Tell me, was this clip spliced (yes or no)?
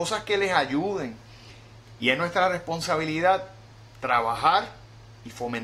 yes